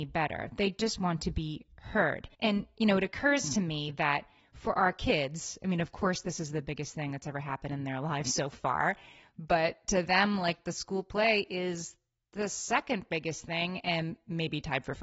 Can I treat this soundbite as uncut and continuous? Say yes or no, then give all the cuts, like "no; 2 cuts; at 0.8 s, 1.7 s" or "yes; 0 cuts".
no; 1 cut; at 2.3 s